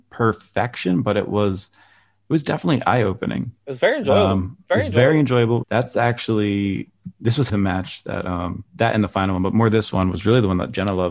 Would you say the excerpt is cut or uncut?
cut